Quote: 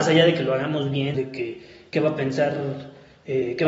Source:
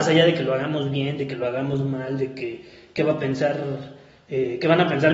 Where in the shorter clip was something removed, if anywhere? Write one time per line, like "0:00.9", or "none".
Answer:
0:01.1